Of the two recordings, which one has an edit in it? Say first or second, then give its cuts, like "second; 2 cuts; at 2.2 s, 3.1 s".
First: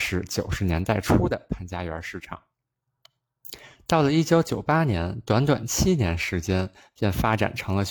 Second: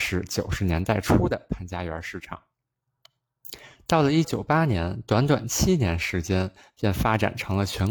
second; 1 cut; at 4.2 s